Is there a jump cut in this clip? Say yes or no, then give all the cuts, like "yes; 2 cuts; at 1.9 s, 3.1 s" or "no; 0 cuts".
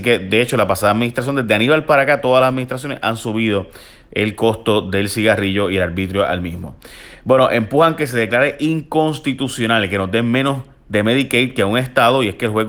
no; 0 cuts